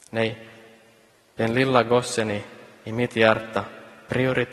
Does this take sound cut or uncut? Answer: uncut